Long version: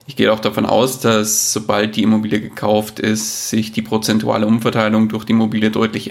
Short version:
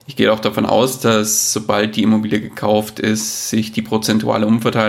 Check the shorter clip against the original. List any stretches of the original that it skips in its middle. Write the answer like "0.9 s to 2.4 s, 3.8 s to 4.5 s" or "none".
none